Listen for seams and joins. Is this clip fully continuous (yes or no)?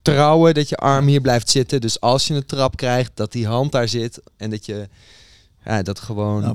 yes